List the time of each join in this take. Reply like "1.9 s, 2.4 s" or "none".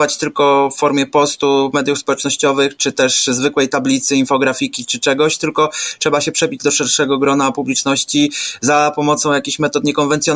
none